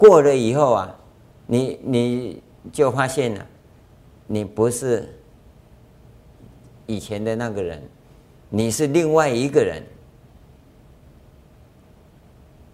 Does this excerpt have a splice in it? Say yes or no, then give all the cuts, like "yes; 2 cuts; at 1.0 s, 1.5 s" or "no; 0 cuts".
no; 0 cuts